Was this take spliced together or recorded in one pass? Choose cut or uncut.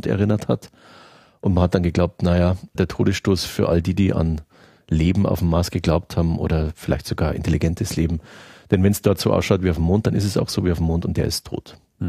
cut